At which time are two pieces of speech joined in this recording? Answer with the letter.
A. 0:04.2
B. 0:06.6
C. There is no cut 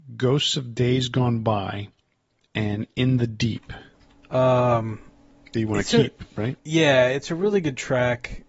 A